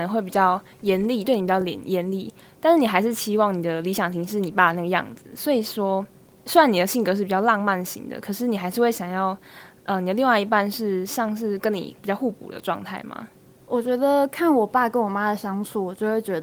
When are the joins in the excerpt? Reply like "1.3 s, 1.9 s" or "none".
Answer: none